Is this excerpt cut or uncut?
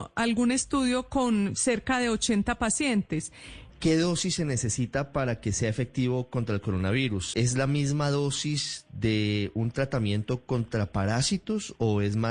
cut